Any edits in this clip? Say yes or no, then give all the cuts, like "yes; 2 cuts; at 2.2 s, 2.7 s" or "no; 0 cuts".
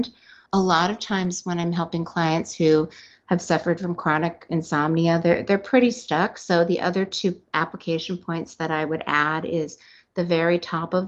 no; 0 cuts